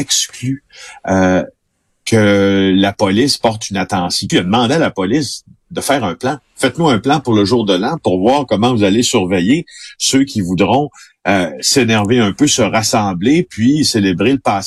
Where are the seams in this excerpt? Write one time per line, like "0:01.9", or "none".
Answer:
0:04.3